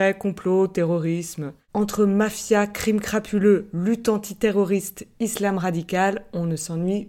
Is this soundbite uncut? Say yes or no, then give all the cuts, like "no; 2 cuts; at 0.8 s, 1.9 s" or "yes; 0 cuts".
no; 1 cut; at 1.7 s